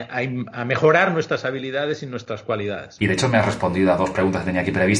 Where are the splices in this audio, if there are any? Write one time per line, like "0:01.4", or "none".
0:03.0